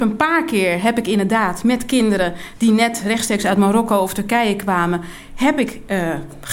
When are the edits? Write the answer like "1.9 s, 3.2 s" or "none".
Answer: none